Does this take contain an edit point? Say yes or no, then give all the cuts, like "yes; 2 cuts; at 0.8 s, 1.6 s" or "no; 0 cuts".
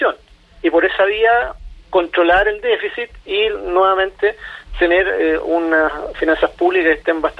no; 0 cuts